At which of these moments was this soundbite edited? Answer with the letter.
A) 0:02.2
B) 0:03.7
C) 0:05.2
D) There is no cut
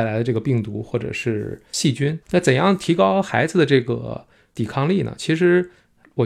A